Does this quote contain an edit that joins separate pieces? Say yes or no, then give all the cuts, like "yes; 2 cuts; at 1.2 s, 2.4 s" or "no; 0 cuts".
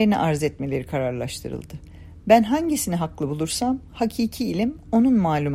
no; 0 cuts